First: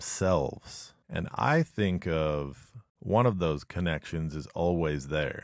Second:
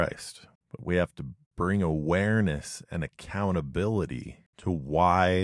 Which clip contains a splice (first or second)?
first